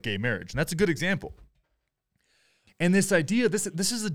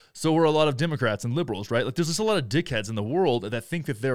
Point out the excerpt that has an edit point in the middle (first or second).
first